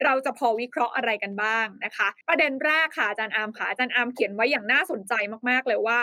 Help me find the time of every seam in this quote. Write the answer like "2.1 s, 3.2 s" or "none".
2.2 s